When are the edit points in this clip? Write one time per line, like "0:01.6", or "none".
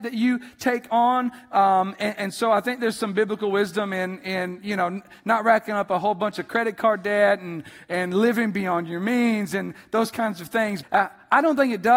0:02.1
0:10.8